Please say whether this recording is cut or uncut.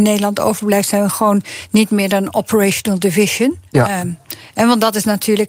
cut